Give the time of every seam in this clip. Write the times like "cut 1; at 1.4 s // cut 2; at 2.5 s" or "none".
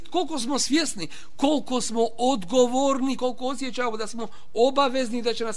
none